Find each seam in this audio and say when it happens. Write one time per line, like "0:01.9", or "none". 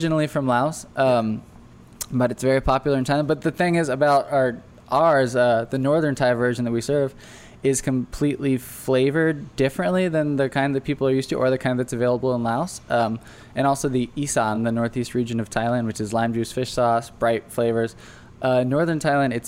none